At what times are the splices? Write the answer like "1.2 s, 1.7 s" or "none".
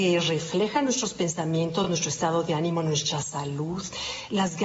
none